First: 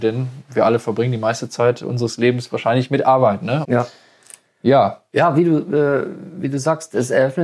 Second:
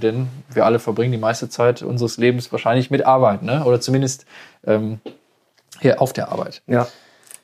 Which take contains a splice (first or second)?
first